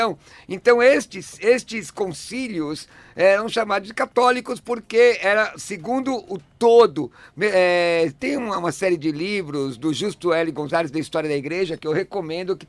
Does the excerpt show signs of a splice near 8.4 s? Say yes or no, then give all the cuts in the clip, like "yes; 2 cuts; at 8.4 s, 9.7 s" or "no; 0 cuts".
no; 0 cuts